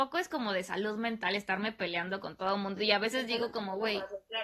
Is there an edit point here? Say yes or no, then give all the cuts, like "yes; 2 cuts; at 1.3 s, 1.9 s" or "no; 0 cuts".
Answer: no; 0 cuts